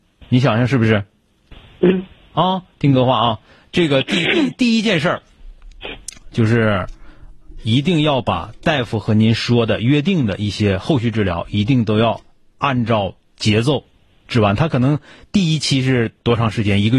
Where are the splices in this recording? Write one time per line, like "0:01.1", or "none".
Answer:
0:06.3